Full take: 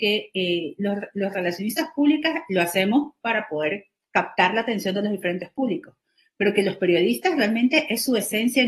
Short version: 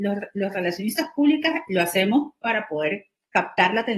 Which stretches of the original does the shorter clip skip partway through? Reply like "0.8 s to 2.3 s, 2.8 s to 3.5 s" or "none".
none